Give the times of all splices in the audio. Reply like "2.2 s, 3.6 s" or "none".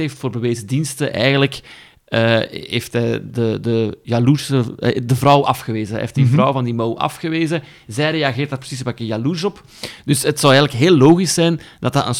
none